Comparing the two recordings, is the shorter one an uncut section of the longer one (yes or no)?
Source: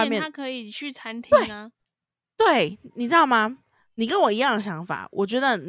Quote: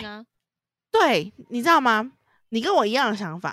yes